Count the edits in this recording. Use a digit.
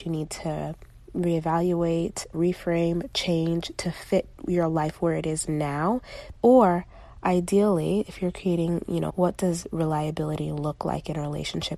3